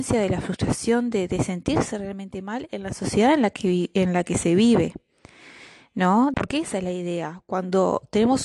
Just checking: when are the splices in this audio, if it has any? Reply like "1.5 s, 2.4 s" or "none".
6.3 s